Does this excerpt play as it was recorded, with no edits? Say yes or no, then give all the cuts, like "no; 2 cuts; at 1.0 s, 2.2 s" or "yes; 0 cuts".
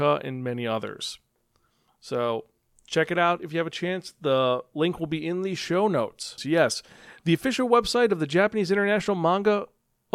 no; 1 cut; at 6.4 s